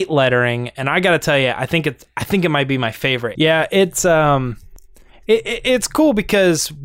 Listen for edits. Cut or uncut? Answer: cut